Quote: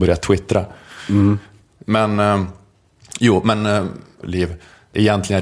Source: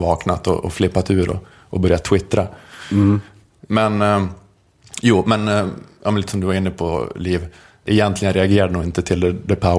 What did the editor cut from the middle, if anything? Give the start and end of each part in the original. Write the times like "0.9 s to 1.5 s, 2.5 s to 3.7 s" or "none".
6.0 s to 7.1 s